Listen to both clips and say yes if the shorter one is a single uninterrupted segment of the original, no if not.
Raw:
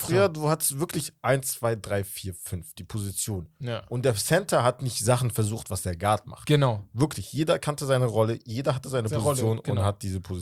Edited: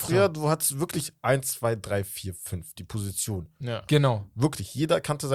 no